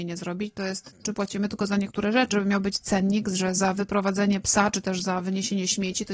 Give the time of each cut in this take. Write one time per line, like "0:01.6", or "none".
0:01.0
0:02.3